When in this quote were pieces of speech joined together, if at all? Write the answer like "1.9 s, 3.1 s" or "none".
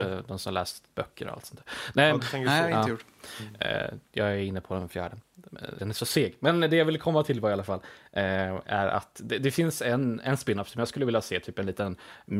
5.8 s